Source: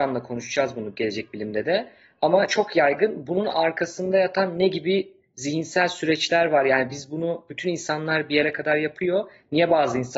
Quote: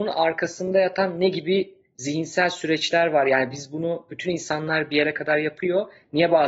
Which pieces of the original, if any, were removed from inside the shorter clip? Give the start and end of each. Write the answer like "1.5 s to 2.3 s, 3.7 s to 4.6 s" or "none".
none